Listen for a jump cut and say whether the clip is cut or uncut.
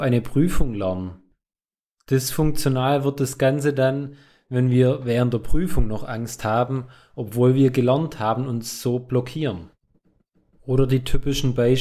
uncut